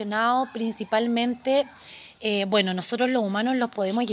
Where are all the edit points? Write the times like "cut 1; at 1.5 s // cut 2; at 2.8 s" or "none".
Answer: none